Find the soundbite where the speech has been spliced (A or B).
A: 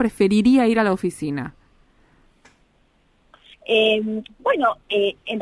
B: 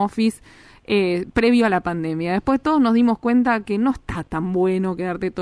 A